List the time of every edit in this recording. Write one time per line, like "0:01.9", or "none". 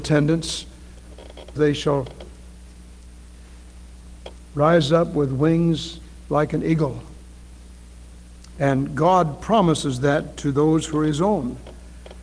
0:01.6